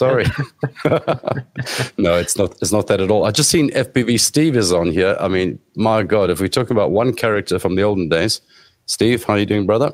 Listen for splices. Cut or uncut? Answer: uncut